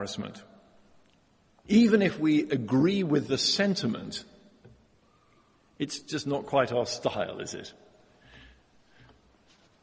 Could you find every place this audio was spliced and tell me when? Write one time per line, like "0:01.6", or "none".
none